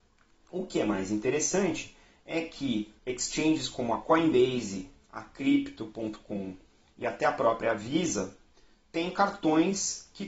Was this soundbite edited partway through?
yes; 1 cut; at 3.0 s

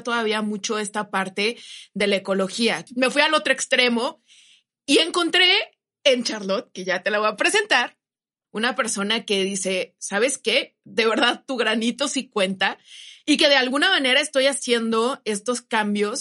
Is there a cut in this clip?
yes; 2 cuts; at 2.9 s, 8.4 s

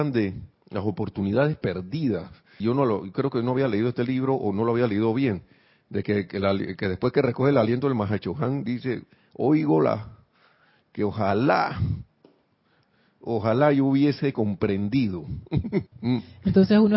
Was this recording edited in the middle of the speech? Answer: yes; 2 cuts; at 2.6 s, 15.9 s

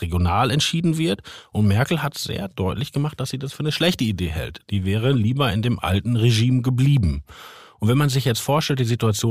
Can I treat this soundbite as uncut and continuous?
yes; 0 cuts

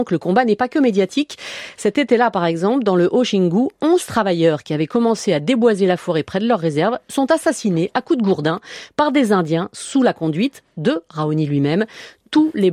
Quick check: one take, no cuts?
yes; 0 cuts

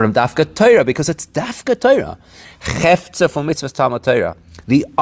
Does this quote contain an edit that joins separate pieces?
yes; 1 cut; at 2.5 s

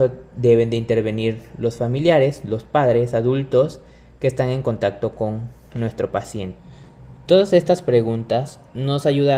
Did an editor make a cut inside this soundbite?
no; 0 cuts

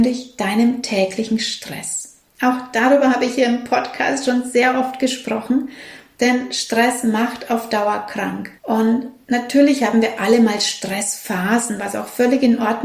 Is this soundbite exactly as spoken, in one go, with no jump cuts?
no; 1 cut; at 8.5 s

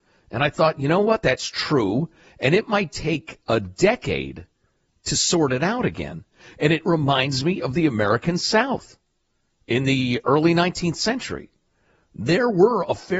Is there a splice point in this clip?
no; 0 cuts

